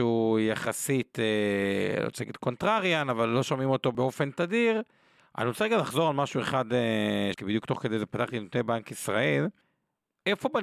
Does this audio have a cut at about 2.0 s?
no; 2 cuts; at 5.2 s, 7.3 s

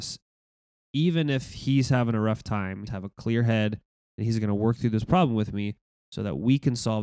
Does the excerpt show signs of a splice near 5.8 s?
no; 1 cut; at 2.9 s

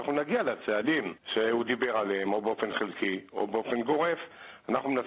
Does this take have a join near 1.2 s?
yes; 1 cut; at 1.2 s

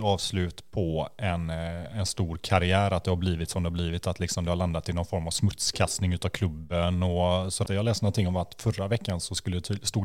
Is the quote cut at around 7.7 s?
yes; 1 cut; at 7.7 s

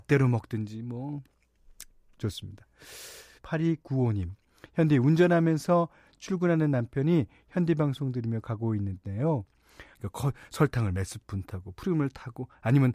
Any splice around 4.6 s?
no; 2 cuts; at 3.4 s, 9.9 s

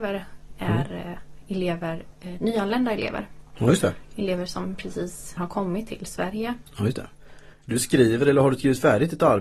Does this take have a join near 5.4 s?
yes; 1 cut; at 5.4 s

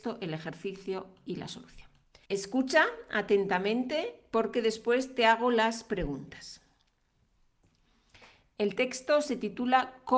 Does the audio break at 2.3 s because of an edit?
yes; 1 cut; at 2.3 s

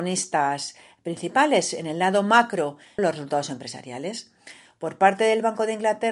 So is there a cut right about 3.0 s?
yes; 1 cut; at 3.0 s

